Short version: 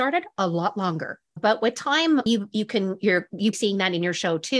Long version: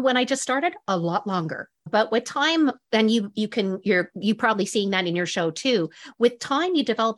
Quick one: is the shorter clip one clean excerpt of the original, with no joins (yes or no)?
no